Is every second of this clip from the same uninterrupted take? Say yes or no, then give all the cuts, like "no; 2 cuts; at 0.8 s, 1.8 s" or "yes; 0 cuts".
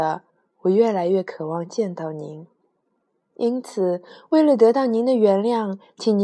yes; 0 cuts